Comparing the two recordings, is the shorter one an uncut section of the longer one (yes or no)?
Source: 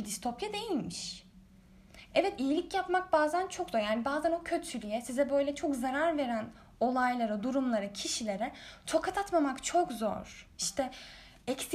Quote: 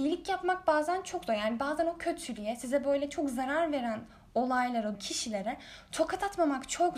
no